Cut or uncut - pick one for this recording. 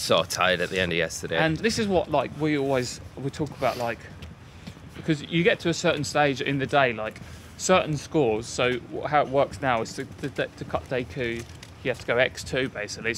cut